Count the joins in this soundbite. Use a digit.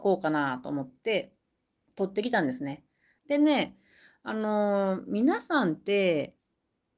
1